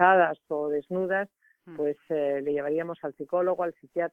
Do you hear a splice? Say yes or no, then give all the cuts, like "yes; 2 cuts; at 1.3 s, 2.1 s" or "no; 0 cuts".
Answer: no; 0 cuts